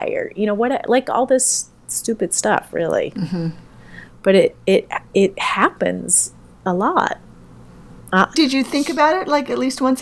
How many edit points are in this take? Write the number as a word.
two